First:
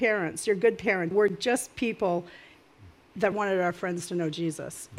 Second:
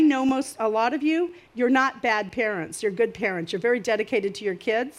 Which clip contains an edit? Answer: first; 2 cuts; at 1.1 s, 3.3 s

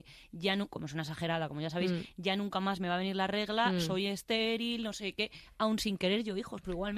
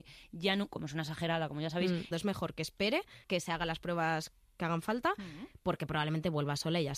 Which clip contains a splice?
second; 2 cuts; at 2.1 s, 3.2 s

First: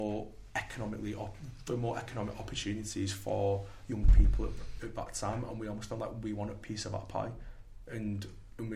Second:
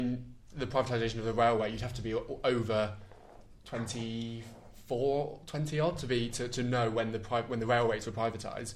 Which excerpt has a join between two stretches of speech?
first; 1 cut; at 4.8 s

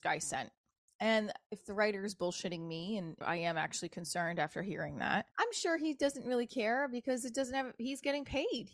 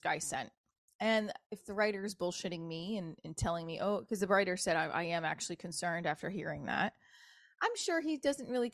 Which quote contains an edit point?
first; 2 cuts; at 3.2 s, 5.3 s

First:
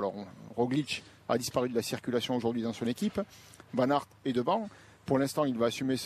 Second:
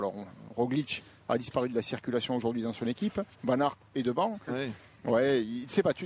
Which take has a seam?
second; 2 cuts; at 3.3 s, 4.5 s

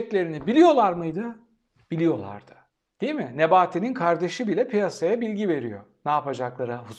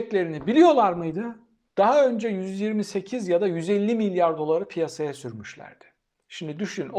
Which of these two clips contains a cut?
second; 1 cut; at 1.7 s

